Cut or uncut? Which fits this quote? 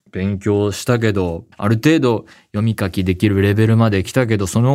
cut